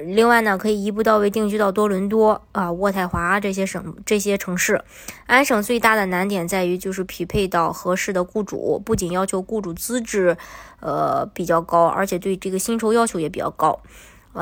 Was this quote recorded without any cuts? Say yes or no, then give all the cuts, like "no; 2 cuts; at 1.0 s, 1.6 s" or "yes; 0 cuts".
yes; 0 cuts